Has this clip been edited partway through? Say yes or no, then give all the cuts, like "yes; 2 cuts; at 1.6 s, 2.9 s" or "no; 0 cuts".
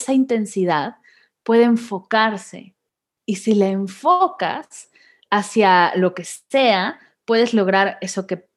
no; 0 cuts